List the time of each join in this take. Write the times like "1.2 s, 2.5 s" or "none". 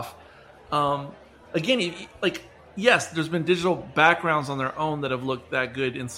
none